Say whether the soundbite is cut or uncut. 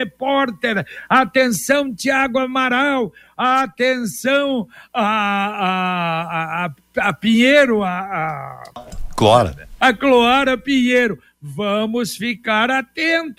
cut